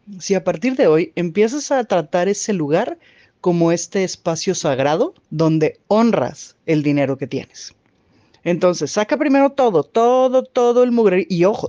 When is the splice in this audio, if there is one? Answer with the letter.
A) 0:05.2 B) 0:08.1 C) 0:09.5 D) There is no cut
A